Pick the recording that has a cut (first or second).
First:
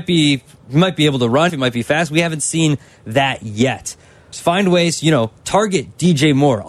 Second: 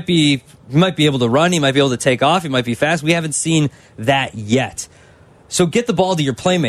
first